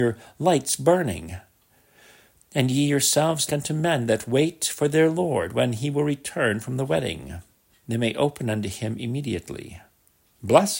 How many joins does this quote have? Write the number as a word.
two